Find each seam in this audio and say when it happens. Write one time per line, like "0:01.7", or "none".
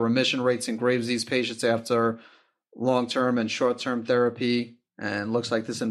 0:04.9